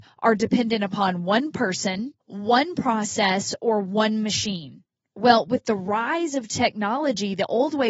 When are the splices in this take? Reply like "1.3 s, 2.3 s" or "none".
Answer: 2.2 s

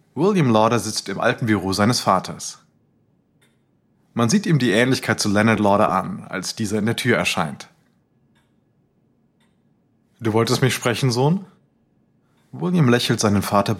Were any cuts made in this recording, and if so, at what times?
none

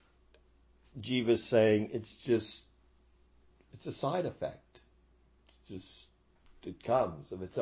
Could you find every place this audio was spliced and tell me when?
none

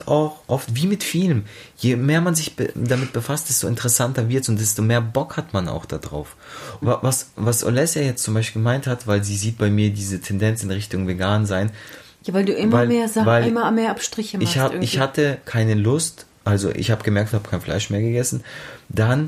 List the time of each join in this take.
6.8 s, 17.3 s

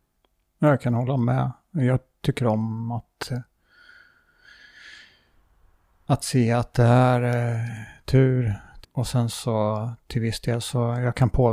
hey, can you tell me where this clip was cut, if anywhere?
8.8 s

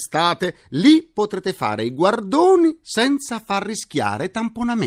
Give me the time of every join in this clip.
none

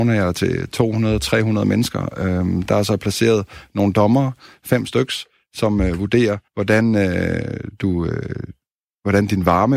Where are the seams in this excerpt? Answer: 6.5 s

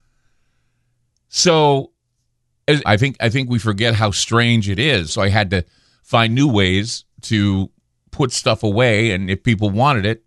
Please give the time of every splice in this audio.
2.8 s, 5.1 s, 7.1 s

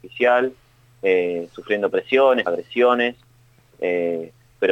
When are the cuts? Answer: 2.5 s

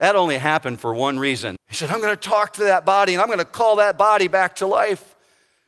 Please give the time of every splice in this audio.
1.6 s

